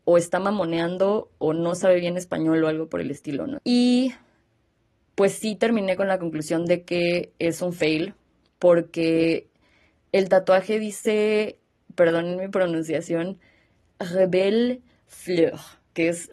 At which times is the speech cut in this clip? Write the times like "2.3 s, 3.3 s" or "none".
3.6 s